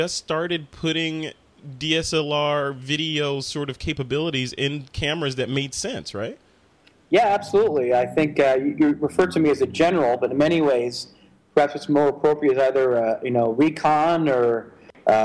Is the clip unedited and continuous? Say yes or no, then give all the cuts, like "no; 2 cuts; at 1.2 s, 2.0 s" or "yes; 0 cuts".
yes; 0 cuts